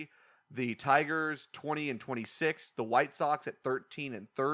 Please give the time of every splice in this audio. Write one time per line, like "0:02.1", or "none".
none